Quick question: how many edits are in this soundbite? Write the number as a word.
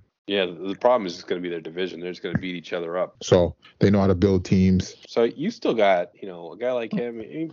two